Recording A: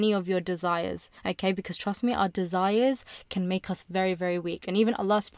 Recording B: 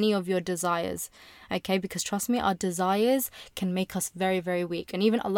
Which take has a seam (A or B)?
A